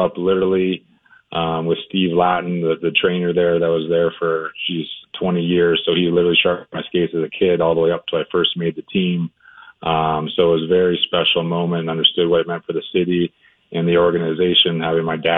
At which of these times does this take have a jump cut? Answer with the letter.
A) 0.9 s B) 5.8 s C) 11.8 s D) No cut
D